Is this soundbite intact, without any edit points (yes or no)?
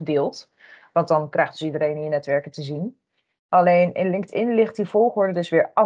yes